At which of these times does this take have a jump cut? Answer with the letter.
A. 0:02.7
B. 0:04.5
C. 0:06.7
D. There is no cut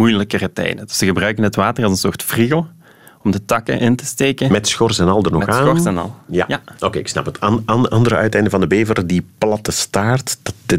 D